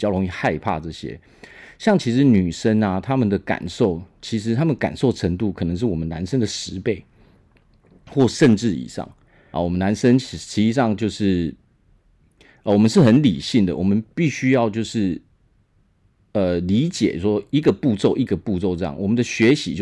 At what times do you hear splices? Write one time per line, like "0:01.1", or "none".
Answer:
0:09.5